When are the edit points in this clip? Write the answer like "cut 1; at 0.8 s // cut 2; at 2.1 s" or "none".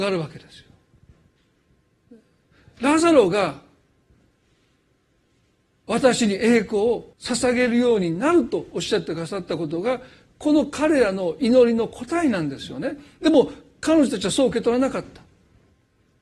cut 1; at 7.1 s